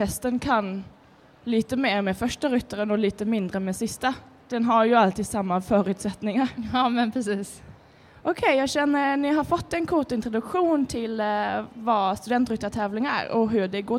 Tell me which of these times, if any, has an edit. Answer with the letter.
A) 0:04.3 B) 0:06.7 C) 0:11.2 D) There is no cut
D